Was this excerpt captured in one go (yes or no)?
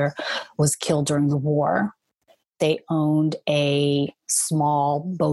yes